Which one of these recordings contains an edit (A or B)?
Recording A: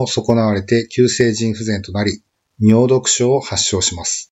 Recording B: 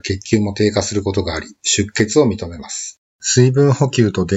B